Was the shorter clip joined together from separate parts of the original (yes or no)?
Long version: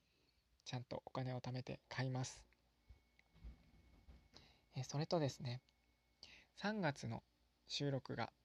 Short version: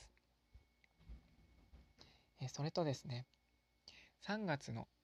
no